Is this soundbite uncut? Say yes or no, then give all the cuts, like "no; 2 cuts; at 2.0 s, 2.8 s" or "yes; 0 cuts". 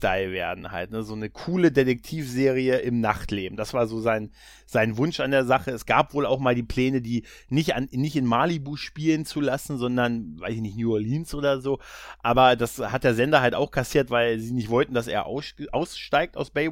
yes; 0 cuts